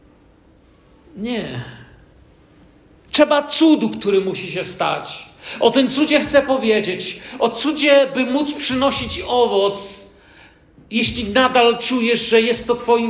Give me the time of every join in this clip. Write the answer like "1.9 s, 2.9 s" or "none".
none